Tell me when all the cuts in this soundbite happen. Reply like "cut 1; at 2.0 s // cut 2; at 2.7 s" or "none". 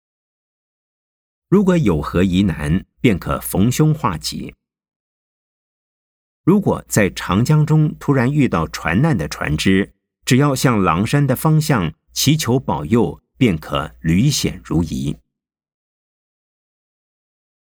cut 1; at 2.9 s